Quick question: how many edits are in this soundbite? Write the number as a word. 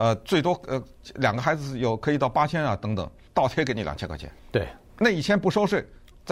two